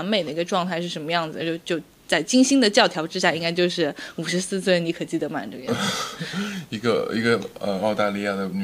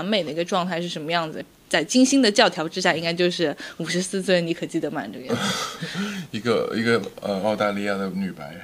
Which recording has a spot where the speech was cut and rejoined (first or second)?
second